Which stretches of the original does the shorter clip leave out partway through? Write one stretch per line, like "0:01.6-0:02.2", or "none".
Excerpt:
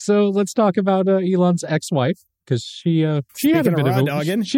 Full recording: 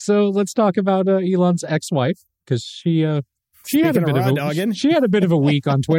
0:03.3-0:03.6